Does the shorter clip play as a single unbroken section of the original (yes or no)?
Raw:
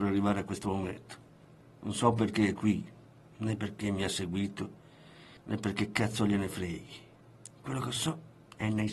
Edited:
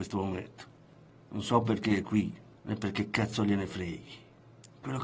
no